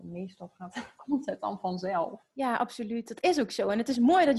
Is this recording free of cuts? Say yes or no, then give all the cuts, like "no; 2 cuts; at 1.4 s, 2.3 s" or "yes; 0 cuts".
yes; 0 cuts